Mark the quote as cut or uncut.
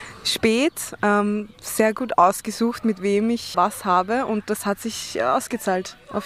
cut